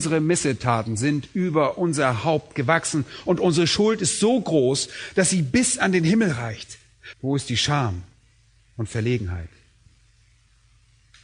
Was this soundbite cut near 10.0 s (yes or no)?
no